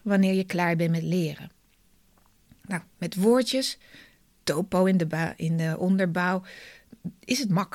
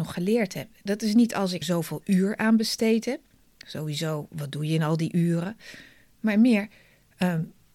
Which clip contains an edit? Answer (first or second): second